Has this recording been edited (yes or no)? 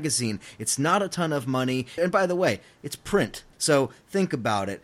yes